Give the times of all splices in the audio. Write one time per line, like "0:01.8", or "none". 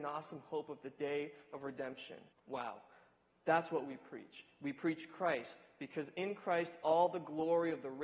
0:02.3